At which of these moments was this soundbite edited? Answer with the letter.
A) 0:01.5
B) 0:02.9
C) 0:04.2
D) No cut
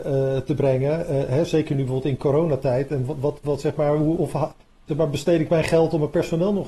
C